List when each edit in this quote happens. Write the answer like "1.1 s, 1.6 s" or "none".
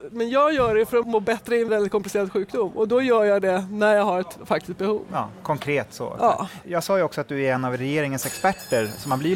1.7 s